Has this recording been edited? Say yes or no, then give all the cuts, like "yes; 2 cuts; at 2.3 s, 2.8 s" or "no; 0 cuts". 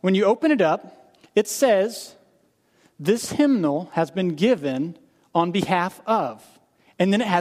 no; 0 cuts